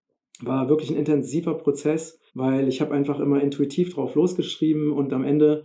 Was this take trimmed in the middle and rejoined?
yes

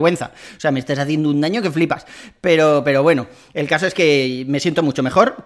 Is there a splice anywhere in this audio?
no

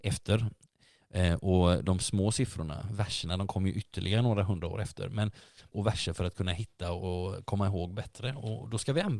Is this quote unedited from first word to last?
no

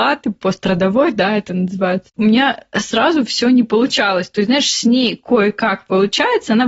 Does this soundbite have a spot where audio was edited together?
no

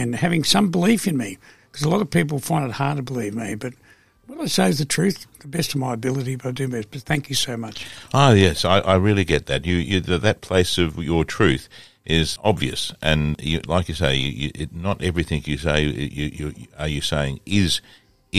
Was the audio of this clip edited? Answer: no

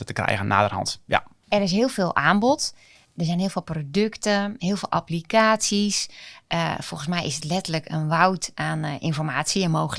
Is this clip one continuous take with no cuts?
yes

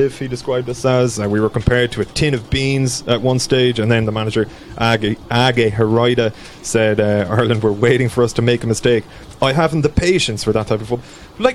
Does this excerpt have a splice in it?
no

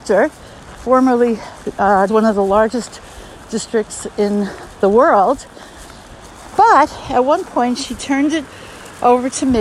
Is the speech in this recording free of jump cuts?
no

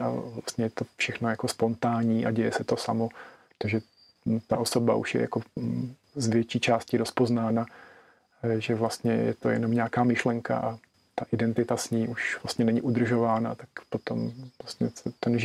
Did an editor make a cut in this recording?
yes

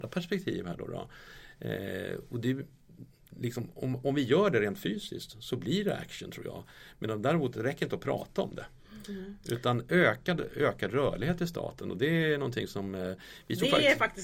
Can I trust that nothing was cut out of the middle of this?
yes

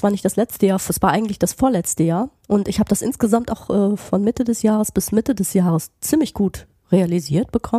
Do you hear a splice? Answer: no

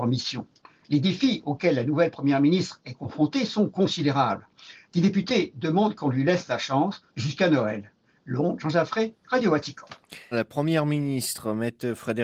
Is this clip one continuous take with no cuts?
no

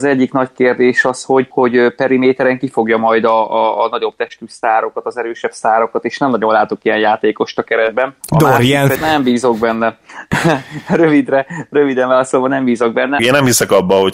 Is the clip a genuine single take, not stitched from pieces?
no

